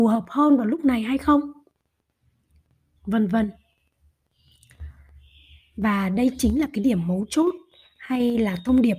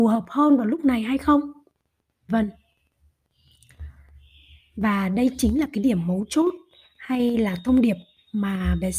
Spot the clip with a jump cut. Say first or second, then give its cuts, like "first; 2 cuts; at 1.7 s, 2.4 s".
second; 1 cut; at 2.3 s